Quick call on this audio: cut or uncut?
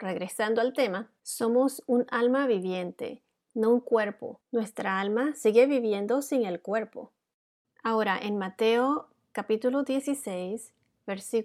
cut